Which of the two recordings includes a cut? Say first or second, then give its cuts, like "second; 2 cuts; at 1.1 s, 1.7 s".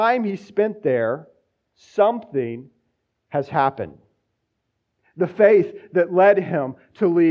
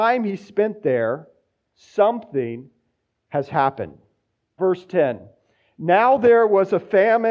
second; 1 cut; at 4.6 s